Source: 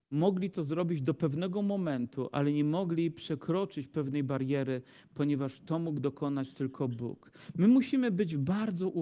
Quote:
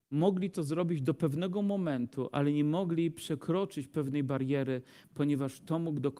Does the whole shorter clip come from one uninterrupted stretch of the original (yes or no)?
yes